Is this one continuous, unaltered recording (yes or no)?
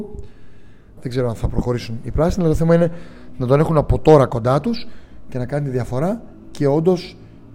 no